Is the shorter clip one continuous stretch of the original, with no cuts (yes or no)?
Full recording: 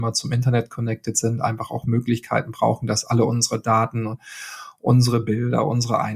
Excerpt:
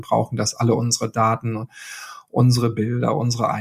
yes